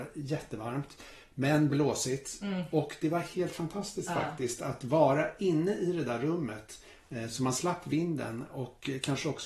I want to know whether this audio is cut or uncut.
uncut